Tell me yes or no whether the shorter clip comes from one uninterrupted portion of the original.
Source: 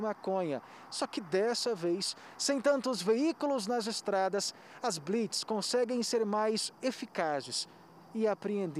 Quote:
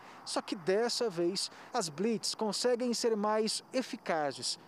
no